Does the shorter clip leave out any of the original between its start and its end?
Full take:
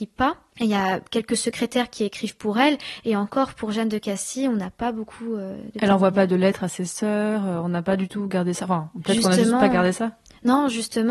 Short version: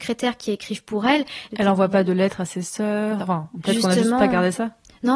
yes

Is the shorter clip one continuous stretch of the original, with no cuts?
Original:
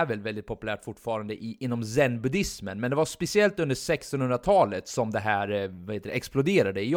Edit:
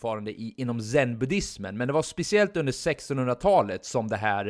yes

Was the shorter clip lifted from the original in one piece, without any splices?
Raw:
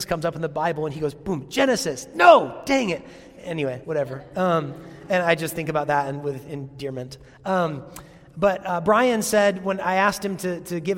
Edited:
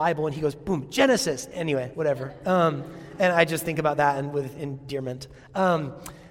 no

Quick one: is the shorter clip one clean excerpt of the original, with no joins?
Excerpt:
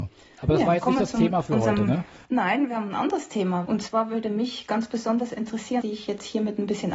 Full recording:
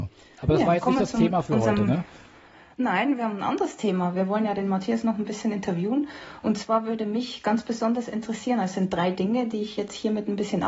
no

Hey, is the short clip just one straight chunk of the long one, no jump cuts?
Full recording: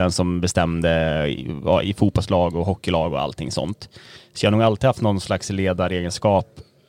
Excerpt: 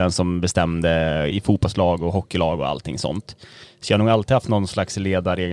no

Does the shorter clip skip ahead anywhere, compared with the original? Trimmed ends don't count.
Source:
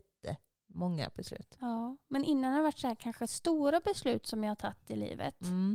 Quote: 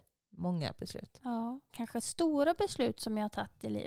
yes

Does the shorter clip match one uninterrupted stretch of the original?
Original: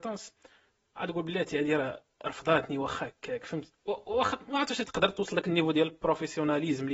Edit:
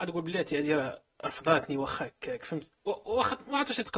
yes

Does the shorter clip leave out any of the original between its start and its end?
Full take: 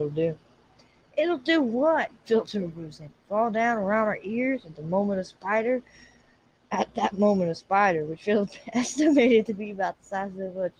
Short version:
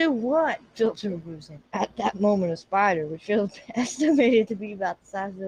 yes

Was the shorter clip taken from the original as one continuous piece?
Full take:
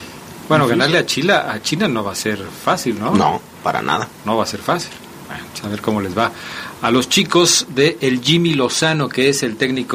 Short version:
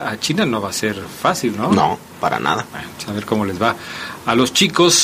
no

